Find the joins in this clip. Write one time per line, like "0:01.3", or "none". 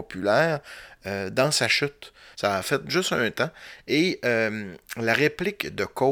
0:02.3